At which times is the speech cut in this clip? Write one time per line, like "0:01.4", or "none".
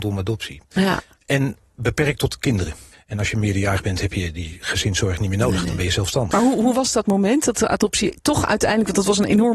0:02.9
0:06.3